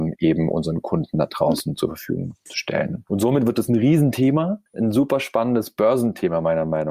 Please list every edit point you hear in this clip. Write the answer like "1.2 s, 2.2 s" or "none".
3.1 s, 4.7 s